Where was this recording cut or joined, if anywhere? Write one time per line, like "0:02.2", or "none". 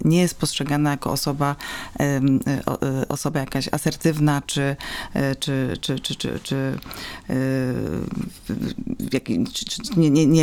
none